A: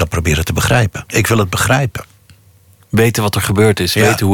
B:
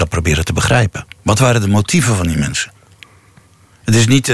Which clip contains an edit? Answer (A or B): A